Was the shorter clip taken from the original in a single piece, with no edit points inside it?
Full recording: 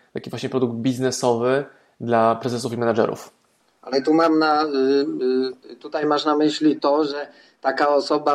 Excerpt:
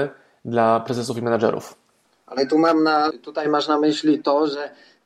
no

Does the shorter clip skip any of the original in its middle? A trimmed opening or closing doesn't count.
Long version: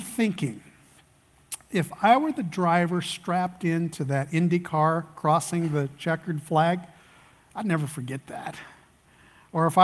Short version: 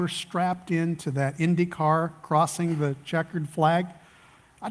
no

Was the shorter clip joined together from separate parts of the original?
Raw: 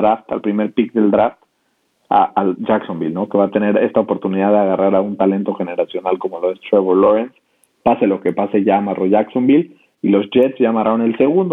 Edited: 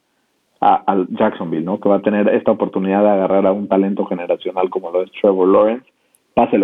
no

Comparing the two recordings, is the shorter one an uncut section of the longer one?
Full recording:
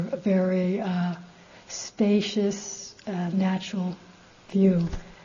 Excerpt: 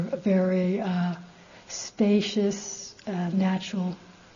yes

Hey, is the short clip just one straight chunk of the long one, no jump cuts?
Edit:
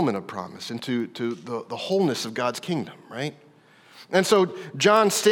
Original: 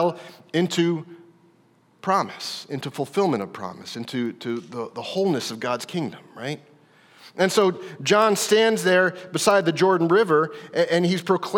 yes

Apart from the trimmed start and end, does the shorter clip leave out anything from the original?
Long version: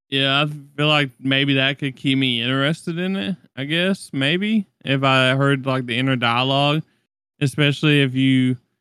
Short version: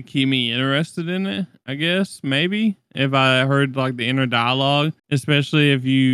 yes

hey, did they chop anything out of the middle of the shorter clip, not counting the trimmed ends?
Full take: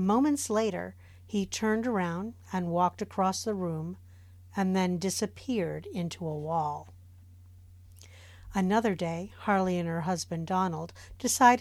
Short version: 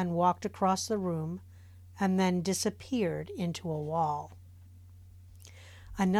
no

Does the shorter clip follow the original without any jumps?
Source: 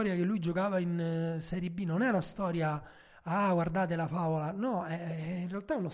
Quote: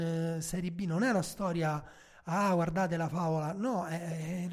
yes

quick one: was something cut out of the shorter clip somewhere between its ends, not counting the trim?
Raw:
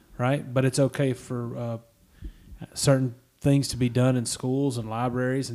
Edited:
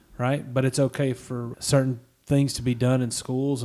yes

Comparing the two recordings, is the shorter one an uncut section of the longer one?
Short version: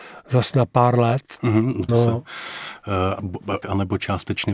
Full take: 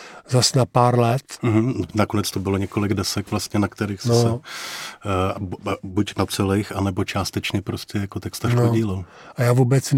no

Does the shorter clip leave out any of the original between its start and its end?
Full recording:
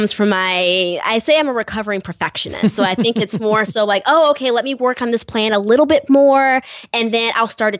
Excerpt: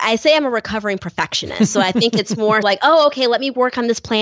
yes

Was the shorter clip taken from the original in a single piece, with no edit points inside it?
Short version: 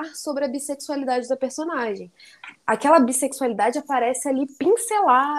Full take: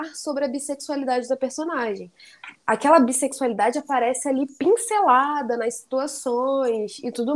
yes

